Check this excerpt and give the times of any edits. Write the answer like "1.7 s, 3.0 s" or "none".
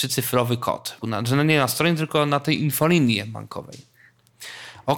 1.0 s